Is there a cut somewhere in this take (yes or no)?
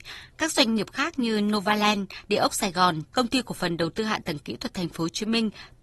yes